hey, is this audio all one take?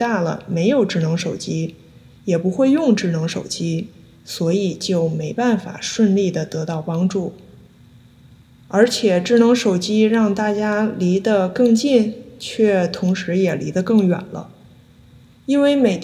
yes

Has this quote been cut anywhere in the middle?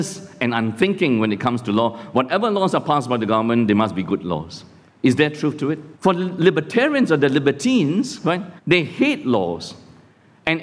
yes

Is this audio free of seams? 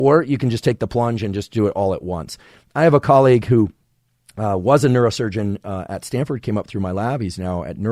yes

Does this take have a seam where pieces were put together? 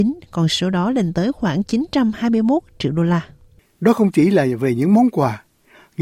no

